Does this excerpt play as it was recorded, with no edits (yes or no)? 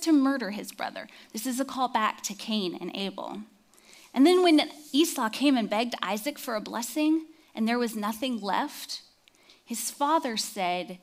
yes